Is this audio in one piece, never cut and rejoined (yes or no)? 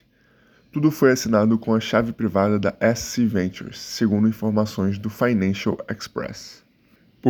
yes